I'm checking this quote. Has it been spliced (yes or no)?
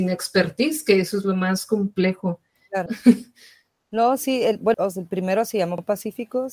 yes